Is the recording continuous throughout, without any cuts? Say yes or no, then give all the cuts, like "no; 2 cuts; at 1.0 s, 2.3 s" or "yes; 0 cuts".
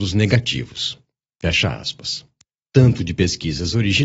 yes; 0 cuts